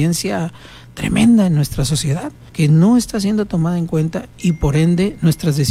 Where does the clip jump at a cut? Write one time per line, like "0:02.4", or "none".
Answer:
0:02.5